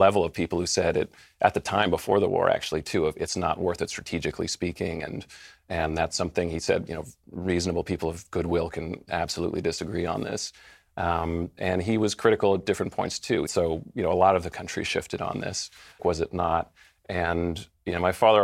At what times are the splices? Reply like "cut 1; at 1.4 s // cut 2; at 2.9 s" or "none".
cut 1; at 13.5 s // cut 2; at 16.0 s